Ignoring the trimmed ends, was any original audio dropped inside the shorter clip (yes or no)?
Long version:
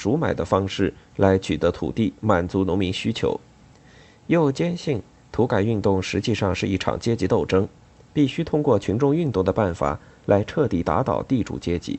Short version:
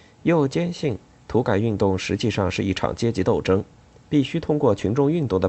no